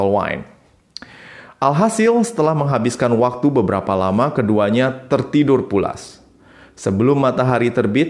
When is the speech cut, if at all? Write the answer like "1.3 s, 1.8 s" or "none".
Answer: none